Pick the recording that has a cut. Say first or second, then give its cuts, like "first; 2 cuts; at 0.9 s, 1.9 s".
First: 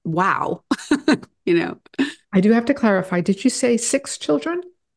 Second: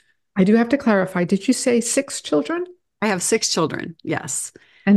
first; 1 cut; at 2.2 s